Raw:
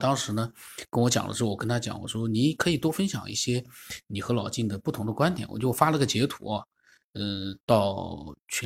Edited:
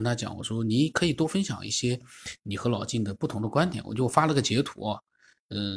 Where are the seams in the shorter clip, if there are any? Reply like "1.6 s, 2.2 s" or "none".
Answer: none